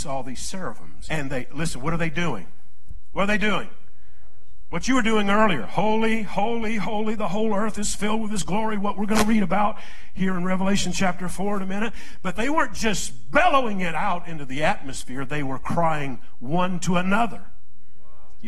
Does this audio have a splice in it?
yes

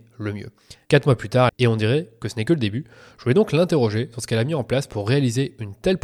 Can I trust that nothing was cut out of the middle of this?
no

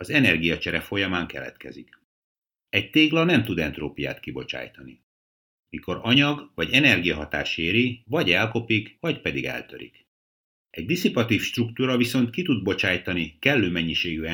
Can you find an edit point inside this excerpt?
no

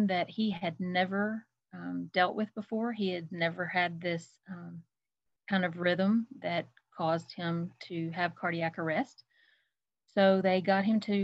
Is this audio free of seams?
yes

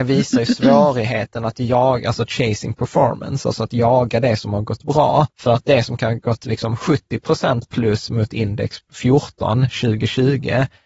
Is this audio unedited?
no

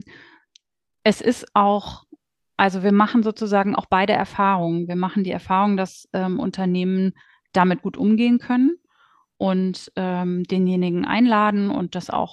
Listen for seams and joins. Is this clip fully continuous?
yes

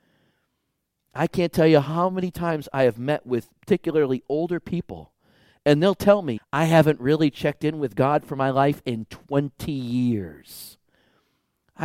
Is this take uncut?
no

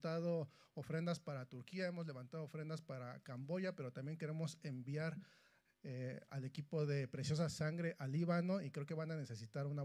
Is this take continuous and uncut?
yes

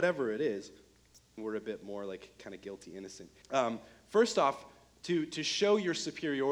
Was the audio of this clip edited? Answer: yes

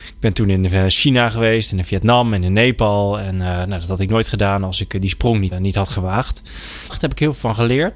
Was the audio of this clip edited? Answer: yes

